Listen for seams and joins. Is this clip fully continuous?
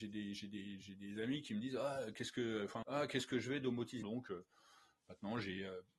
no; 2 cuts; at 2.8 s, 4.0 s

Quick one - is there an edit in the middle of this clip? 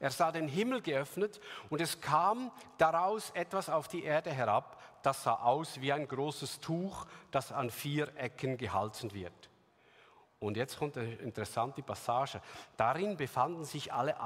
no; 0 cuts

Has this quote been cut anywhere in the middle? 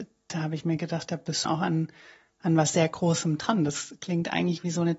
yes; 1 cut; at 1.5 s

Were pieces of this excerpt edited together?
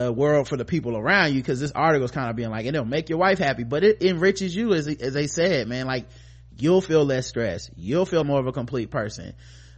yes; 1 cut; at 8.2 s

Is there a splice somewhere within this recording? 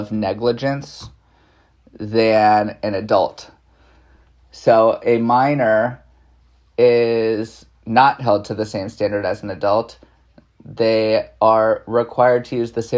no; 0 cuts

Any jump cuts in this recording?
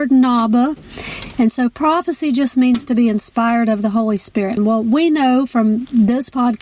yes; 1 cut; at 4.6 s

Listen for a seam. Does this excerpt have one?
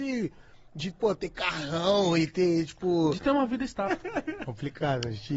yes; 1 cut; at 3.9 s

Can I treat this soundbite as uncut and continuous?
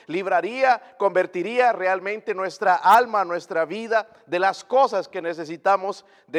yes; 0 cuts

